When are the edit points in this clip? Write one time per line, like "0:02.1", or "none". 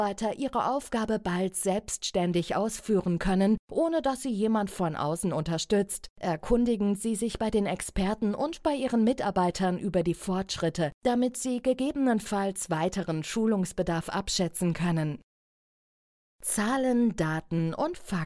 0:06.1